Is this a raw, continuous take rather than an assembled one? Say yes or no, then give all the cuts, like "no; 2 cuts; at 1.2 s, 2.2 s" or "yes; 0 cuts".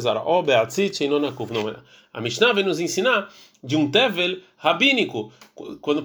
yes; 0 cuts